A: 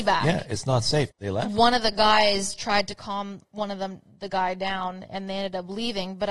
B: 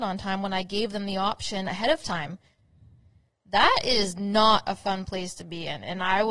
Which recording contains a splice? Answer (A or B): A